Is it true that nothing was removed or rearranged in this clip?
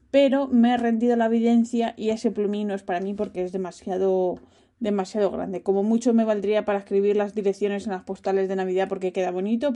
yes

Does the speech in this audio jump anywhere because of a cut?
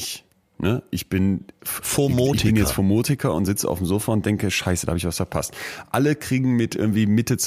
no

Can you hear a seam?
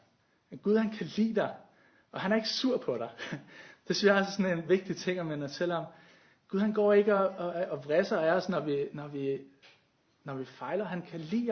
no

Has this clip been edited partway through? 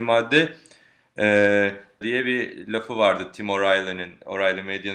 yes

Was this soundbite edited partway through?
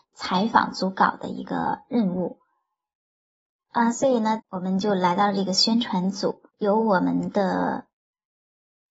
yes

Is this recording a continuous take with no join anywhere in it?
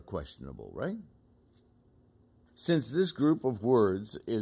no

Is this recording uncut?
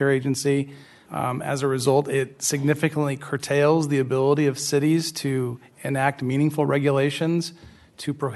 no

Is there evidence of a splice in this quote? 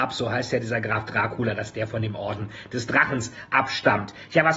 no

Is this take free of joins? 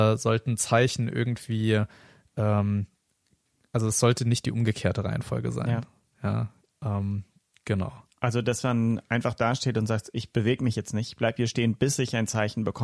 yes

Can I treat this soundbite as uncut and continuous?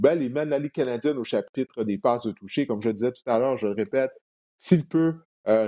yes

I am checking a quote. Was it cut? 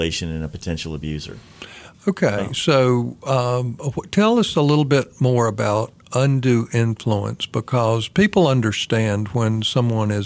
no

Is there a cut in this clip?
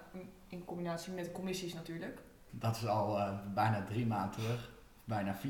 yes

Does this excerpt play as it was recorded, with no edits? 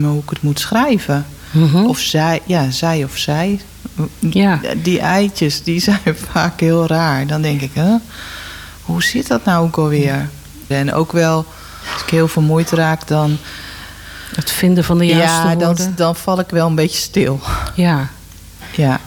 no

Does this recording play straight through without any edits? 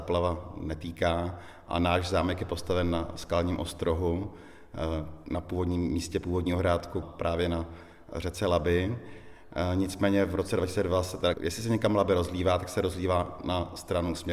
no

